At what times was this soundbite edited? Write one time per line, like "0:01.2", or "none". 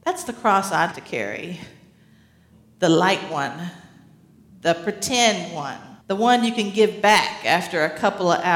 0:00.9
0:06.0